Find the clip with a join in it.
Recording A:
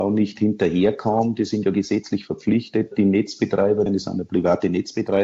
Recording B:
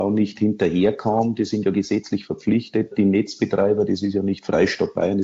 A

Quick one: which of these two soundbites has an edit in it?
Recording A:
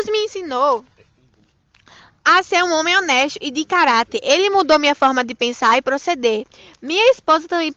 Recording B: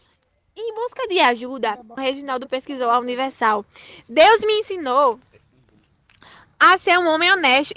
B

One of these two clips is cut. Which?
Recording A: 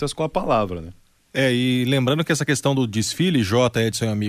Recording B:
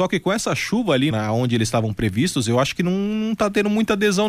B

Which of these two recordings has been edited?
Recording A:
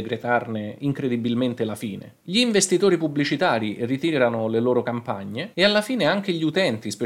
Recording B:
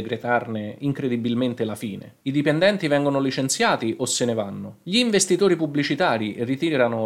A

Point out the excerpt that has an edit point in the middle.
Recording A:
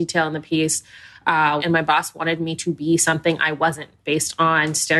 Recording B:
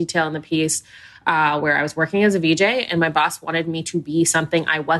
A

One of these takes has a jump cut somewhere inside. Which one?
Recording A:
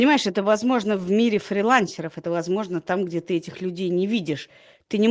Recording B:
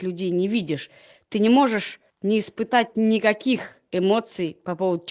B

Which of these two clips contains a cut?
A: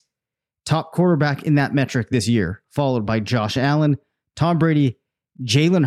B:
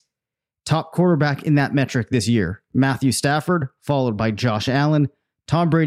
A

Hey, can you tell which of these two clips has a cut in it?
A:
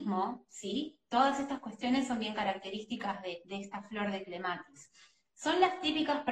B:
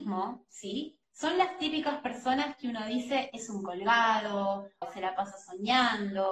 B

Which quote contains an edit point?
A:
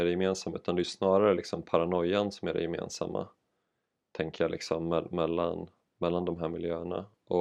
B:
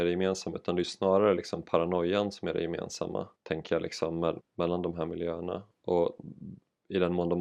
B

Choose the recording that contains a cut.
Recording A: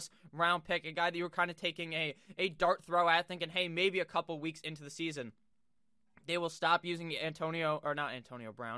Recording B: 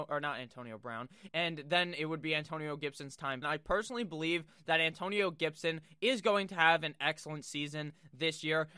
B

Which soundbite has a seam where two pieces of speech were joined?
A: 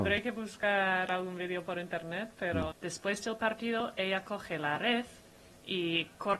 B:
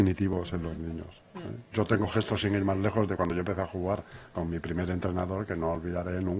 A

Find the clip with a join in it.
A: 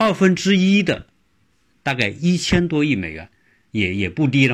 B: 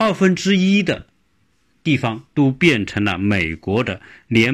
A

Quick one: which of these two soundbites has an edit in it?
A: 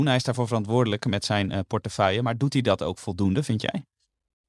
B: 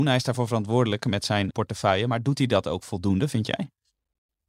B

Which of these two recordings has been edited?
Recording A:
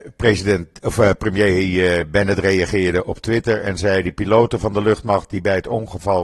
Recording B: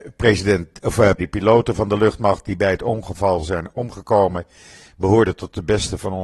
B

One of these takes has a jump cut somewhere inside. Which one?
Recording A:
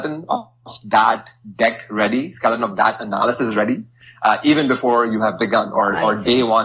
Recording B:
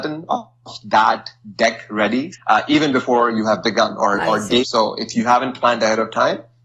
B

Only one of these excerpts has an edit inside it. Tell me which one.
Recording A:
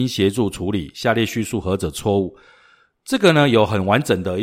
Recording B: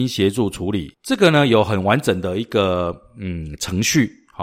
B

